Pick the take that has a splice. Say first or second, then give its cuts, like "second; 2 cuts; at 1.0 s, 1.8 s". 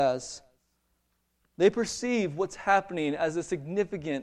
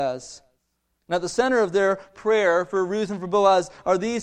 second; 1 cut; at 1.0 s